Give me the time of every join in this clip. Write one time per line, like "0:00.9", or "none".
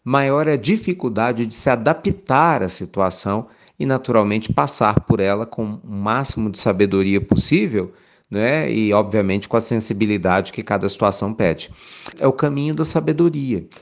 0:12.1